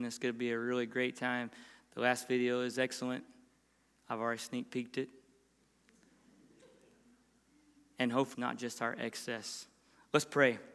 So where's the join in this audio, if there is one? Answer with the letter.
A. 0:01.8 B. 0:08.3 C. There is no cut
B